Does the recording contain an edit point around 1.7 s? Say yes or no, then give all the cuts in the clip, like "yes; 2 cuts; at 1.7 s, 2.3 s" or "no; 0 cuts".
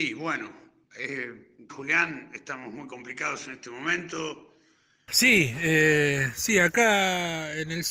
yes; 2 cuts; at 1.7 s, 5.1 s